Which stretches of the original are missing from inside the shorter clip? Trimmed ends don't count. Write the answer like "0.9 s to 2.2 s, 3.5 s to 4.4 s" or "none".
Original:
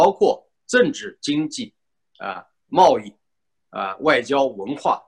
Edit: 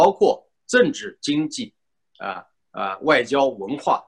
2.5 s to 3.5 s